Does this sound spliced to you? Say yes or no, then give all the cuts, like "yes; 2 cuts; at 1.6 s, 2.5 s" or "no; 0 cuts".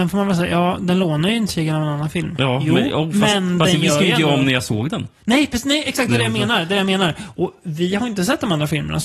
no; 0 cuts